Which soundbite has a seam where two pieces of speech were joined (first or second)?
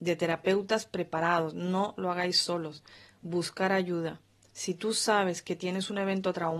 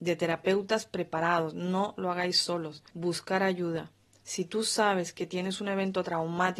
second